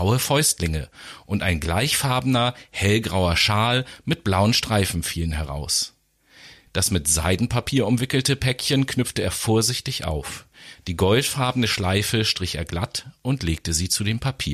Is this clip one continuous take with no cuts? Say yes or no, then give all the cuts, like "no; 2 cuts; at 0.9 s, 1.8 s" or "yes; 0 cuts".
no; 1 cut; at 6.7 s